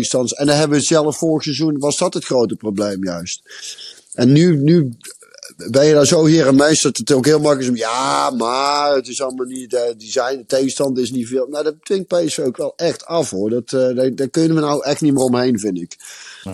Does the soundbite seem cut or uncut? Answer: uncut